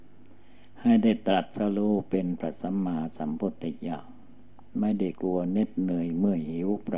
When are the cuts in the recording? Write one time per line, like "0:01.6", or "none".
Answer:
0:05.1